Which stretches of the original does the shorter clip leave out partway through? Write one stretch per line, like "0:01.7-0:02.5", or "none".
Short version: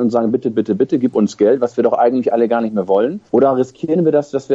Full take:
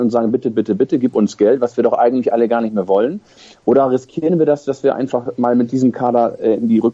0:03.3-0:03.6